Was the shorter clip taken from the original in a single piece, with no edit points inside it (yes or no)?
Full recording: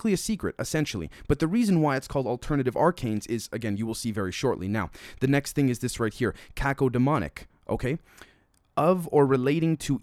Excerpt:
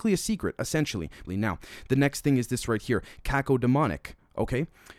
no